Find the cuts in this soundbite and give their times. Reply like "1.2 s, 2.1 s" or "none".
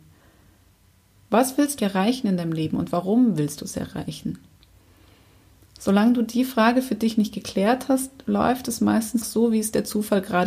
1.8 s, 9.2 s